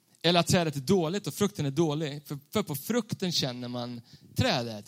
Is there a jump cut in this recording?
no; 0 cuts

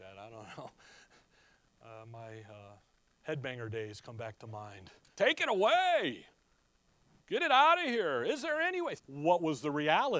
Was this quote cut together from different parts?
yes; 2 cuts; at 5.1 s, 9.0 s

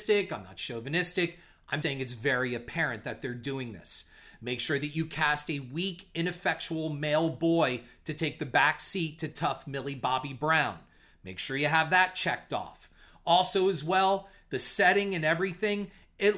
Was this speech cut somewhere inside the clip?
yes; 1 cut; at 1.8 s

